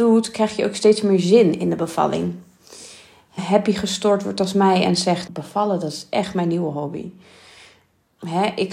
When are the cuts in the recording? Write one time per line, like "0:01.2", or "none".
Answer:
0:03.4
0:05.3